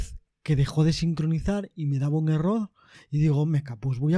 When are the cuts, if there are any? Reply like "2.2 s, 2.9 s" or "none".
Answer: 2.9 s